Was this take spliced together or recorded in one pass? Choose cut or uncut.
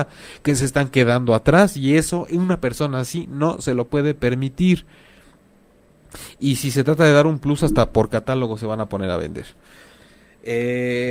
uncut